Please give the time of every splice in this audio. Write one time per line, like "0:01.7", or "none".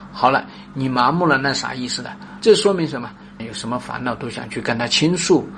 0:02.4
0:03.4